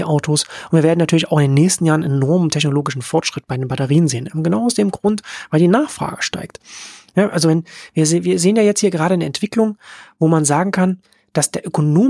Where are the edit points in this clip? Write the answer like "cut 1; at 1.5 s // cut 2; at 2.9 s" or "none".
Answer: none